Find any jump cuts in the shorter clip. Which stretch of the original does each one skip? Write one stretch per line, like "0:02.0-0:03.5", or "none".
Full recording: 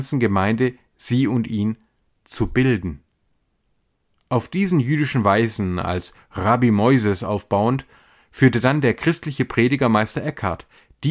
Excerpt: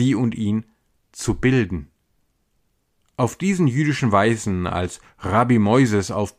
none